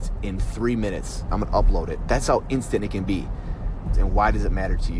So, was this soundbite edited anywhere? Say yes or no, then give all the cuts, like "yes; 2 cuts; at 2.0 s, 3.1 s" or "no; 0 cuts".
yes; 1 cut; at 3.9 s